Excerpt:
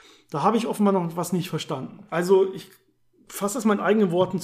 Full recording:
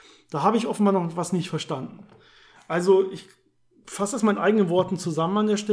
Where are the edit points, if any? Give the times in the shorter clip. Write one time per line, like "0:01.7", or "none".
0:02.1